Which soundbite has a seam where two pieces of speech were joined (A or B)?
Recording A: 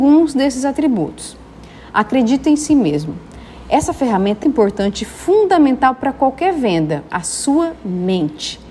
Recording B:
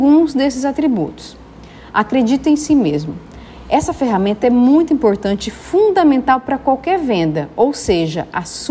A